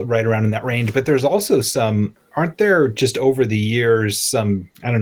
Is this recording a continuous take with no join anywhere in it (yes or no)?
yes